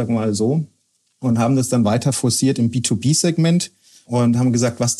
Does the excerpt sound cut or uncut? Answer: uncut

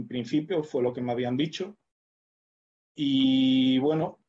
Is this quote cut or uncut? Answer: uncut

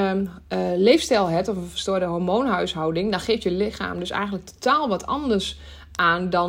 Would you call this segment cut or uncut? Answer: uncut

